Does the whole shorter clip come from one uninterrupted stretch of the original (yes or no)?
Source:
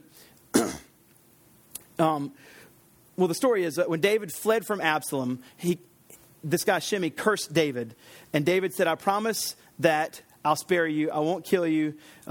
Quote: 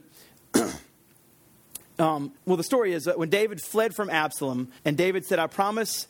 no